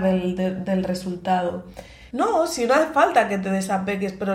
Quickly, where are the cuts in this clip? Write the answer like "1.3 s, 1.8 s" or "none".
2.1 s